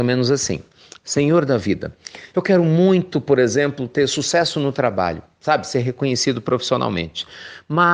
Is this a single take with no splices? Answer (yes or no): yes